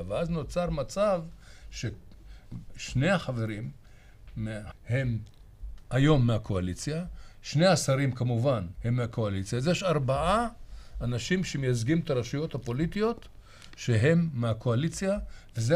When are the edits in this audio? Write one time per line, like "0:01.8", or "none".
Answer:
0:04.7
0:08.7